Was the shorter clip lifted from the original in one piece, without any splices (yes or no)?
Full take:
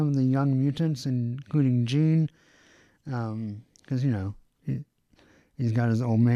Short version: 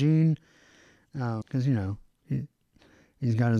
no